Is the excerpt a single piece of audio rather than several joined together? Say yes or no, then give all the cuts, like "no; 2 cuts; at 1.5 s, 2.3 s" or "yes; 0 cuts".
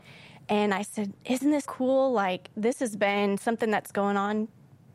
no; 1 cut; at 1.6 s